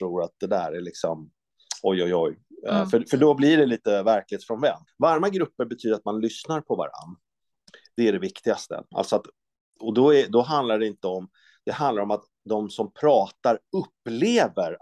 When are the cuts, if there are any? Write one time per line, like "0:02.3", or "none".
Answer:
0:04.9